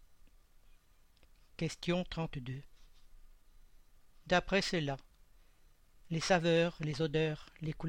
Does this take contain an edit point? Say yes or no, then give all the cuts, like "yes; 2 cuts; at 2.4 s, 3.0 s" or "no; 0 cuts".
no; 0 cuts